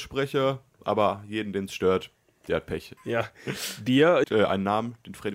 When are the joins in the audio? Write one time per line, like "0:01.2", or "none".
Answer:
0:03.0
0:04.2